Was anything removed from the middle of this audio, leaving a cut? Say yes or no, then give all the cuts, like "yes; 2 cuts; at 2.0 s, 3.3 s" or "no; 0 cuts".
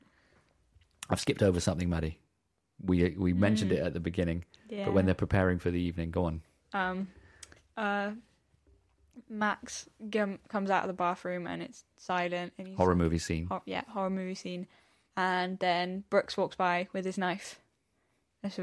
no; 0 cuts